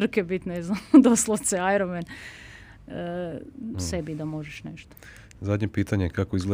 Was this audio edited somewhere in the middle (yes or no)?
yes